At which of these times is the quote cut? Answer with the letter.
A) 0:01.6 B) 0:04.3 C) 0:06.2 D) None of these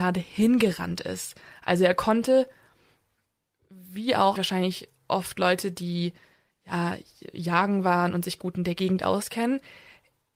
B